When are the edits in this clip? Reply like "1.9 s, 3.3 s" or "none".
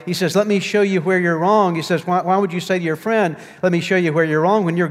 none